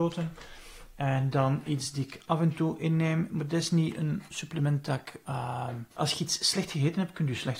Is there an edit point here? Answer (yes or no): yes